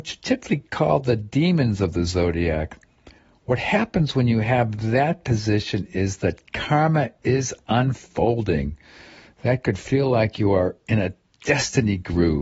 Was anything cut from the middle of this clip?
no; 0 cuts

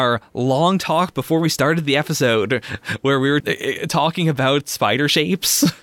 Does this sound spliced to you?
yes; 1 cut; at 3.4 s

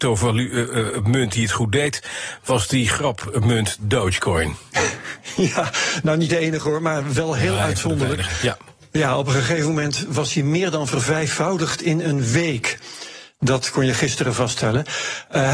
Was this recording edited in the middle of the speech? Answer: no; 0 cuts

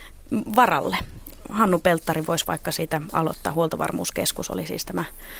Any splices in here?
no; 0 cuts

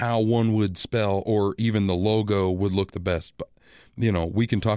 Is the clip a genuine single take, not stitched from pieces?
yes; 0 cuts

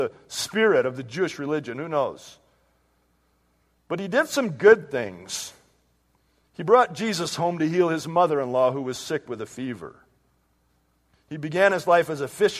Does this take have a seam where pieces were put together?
yes; 1 cut; at 11.1 s

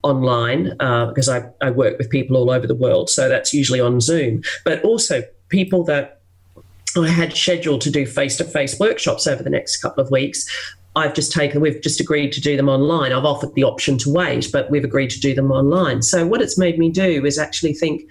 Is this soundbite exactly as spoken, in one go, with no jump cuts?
yes; 0 cuts

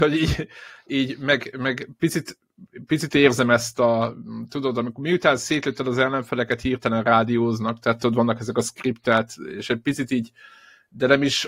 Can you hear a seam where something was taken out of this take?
no; 0 cuts

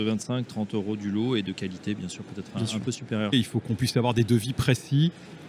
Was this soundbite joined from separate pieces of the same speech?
yes; 1 cut; at 3.3 s

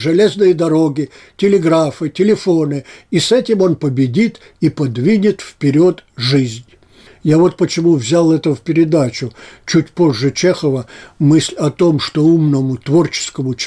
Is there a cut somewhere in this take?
no; 0 cuts

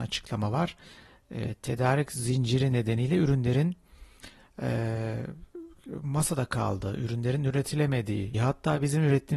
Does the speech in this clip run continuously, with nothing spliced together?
no; 1 cut; at 8.3 s

